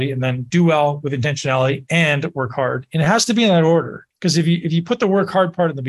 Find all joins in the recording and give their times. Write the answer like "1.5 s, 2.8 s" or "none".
4.1 s